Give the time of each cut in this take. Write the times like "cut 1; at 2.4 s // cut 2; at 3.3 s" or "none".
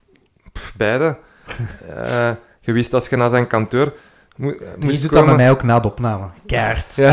none